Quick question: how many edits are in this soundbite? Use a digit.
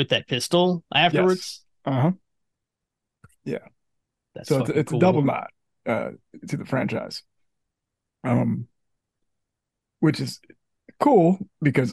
0